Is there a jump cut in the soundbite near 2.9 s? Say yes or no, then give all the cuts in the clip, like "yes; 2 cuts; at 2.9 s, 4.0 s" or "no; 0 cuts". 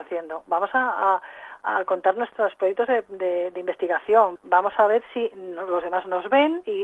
no; 1 cut; at 4.4 s